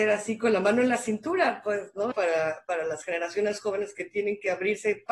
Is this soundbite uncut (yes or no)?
no